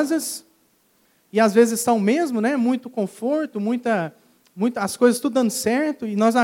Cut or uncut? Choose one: uncut